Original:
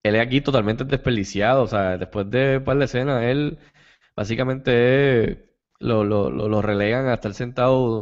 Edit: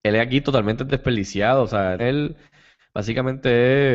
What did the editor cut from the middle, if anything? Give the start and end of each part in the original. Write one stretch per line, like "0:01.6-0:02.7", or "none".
0:02.0-0:03.2